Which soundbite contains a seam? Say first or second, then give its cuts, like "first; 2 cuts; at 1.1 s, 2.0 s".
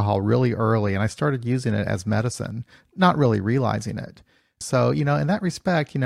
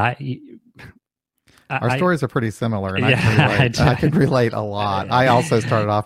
first; 1 cut; at 4.6 s